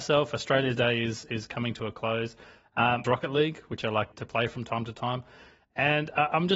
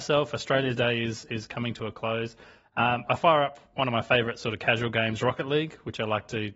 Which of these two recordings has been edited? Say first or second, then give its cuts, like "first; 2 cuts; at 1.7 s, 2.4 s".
first; 2 cuts; at 3.0 s, 4.1 s